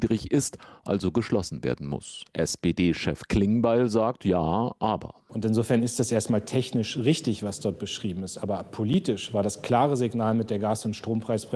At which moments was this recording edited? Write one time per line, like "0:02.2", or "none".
none